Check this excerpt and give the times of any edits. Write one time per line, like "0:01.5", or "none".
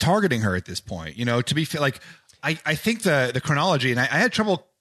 none